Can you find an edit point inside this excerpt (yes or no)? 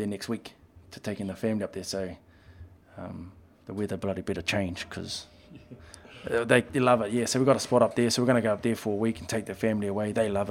no